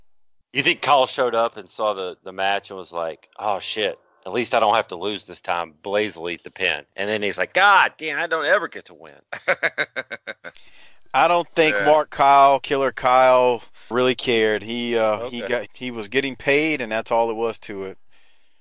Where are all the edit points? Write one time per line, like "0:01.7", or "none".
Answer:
0:13.9
0:15.7